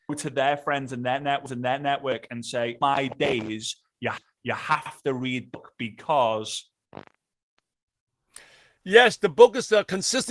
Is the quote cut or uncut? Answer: uncut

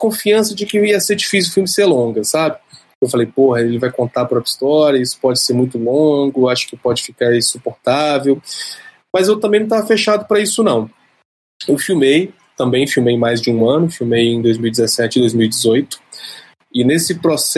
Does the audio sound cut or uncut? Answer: uncut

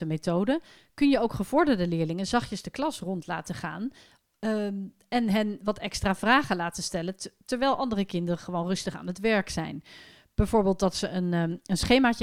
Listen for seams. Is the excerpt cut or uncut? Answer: uncut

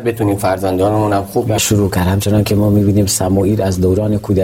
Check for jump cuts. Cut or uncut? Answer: cut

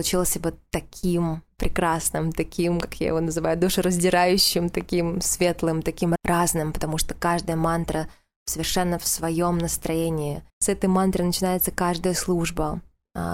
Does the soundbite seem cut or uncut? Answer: cut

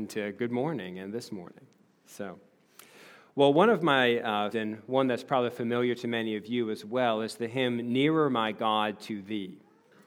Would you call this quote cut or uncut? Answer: cut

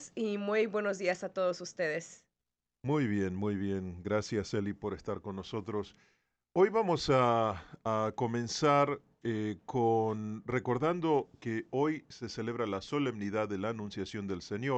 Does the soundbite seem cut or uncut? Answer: uncut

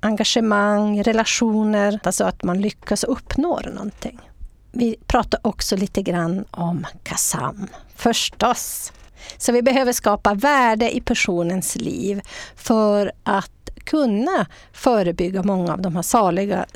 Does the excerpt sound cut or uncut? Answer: cut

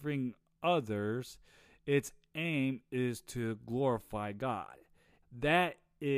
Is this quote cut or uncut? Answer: cut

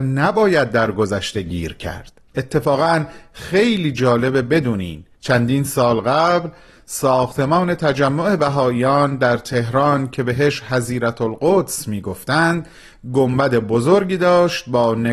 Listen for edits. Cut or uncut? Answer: cut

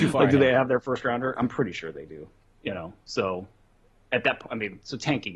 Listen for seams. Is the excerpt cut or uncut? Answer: uncut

